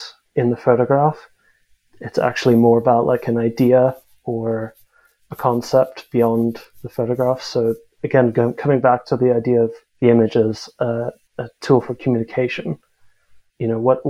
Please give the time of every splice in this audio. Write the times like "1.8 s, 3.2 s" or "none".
none

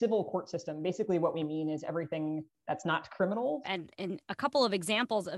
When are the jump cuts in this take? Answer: 3.6 s

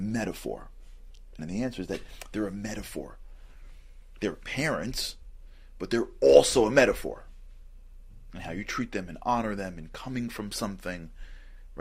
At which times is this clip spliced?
1.4 s, 4.2 s

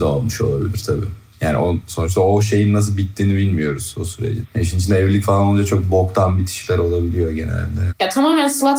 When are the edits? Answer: 4.4 s, 7.9 s

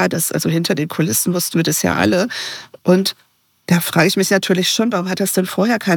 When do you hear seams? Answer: none

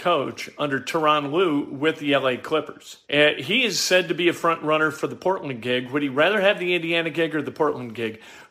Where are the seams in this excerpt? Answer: 3.0 s

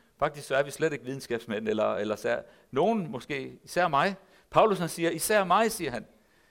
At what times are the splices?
none

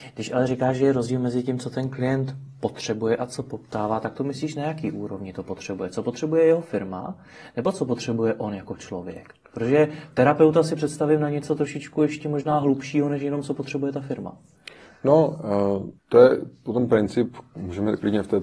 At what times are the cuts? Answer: 16.0 s

